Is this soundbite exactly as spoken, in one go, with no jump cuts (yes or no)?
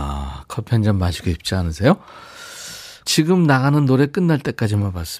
no